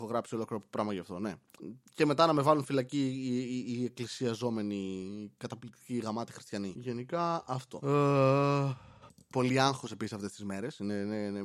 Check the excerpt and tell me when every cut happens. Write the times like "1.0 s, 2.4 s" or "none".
none